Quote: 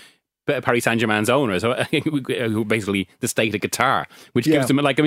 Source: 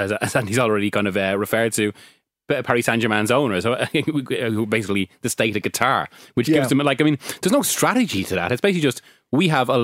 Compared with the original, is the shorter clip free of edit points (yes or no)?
yes